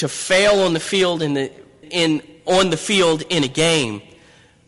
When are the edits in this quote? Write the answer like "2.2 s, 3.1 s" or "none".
1.8 s